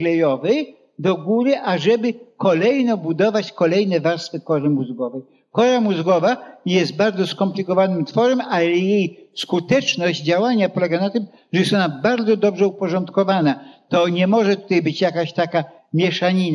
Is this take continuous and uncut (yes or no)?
yes